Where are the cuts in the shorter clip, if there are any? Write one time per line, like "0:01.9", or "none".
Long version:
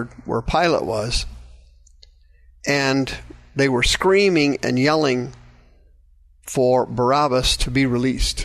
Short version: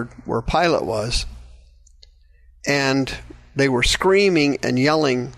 none